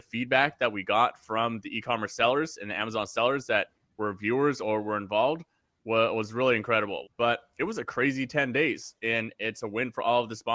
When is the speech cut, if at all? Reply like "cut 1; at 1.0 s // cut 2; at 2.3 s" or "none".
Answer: cut 1; at 7.0 s // cut 2; at 9.0 s